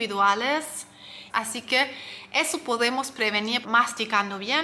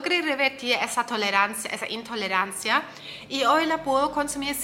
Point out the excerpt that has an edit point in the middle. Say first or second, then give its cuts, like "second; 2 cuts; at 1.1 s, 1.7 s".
first; 2 cuts; at 1.3 s, 3.6 s